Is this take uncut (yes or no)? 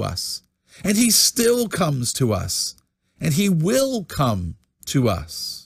yes